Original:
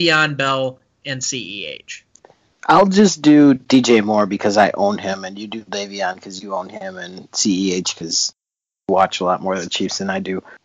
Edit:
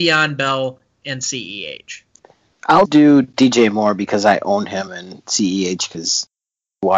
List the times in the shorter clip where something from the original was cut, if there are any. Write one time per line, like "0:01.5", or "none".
0:02.8
0:04.9